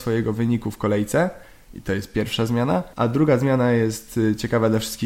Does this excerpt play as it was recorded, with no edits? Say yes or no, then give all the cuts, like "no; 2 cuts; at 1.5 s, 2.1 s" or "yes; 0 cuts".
no; 1 cut; at 2.9 s